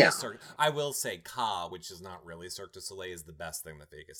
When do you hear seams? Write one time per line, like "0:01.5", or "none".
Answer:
none